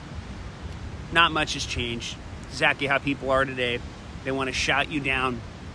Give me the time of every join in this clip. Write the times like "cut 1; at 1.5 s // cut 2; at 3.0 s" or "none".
none